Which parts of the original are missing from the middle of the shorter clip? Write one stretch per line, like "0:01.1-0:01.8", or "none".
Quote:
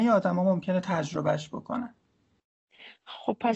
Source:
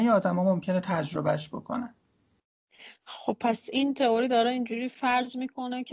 none